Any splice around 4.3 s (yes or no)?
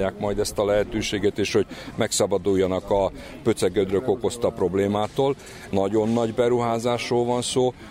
no